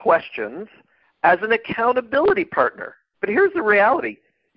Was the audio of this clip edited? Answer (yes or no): yes